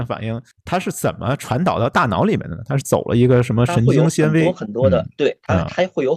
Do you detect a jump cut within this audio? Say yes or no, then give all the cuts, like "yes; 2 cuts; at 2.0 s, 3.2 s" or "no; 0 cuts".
no; 0 cuts